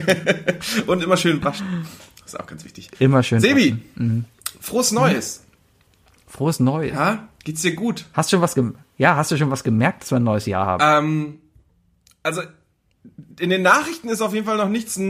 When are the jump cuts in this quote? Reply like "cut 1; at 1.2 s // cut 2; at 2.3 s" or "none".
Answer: none